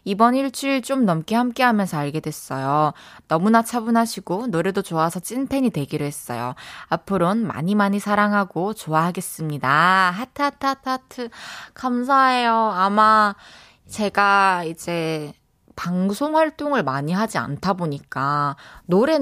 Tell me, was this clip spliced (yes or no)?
no